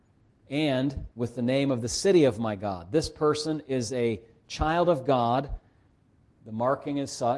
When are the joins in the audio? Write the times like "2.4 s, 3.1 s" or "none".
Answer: 1.1 s